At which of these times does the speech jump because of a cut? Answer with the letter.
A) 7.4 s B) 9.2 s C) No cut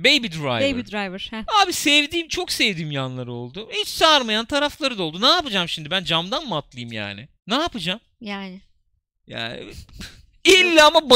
A